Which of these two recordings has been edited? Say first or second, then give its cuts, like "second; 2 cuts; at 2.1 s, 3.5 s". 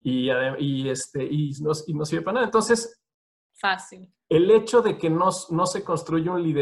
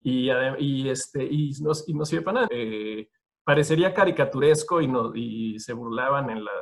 second; 1 cut; at 2.5 s